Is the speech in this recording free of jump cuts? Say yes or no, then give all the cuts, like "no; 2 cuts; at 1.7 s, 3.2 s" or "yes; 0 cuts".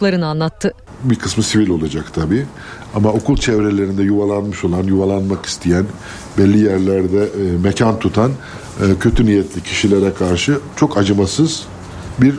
yes; 0 cuts